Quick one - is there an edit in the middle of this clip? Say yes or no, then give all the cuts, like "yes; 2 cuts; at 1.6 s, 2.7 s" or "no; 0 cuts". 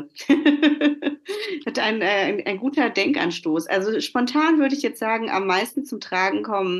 no; 0 cuts